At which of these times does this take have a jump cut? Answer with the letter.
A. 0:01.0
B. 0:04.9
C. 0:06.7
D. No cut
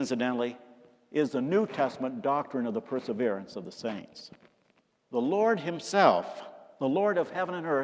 B